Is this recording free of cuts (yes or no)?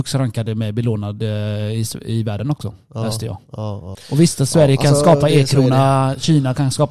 no